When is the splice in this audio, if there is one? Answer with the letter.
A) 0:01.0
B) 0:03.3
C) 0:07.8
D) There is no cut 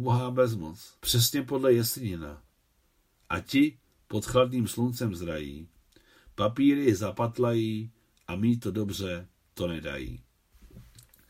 A